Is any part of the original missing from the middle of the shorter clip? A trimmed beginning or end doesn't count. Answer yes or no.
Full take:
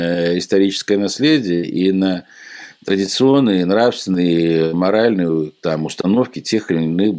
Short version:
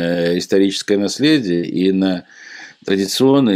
no